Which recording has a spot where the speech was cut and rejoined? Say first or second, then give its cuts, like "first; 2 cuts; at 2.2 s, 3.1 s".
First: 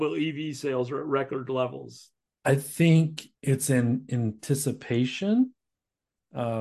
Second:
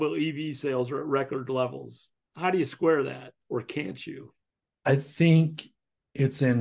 first; 2 cuts; at 2.3 s, 3.4 s